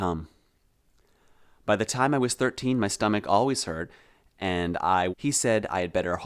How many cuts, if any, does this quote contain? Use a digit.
1